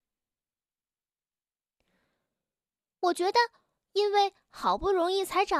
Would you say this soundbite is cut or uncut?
uncut